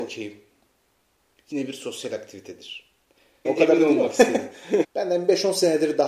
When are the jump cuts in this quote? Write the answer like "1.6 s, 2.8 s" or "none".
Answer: 3.4 s, 4.8 s